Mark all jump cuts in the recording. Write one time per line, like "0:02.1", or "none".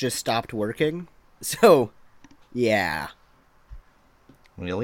0:01.2